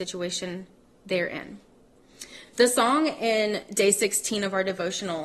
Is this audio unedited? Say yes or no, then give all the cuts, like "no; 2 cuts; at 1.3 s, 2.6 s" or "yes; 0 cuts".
yes; 0 cuts